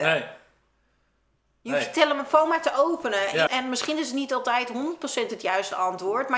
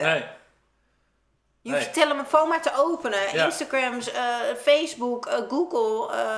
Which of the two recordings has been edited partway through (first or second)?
first